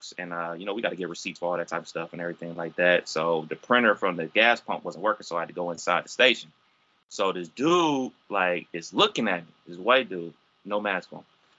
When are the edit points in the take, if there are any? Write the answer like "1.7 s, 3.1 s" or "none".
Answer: none